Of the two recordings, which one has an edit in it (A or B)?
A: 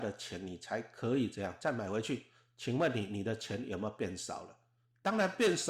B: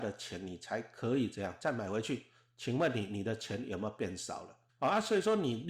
B